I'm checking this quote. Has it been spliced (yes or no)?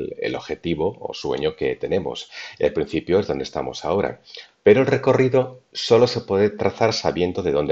no